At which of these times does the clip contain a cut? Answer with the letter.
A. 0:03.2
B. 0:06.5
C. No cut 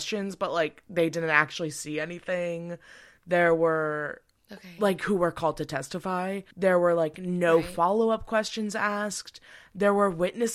B